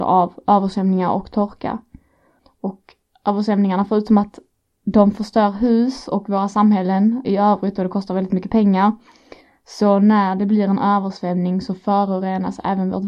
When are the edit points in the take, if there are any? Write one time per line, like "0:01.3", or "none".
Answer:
0:07.2